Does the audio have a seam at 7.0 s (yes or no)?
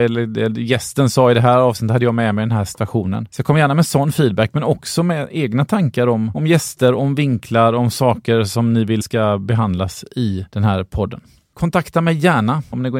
no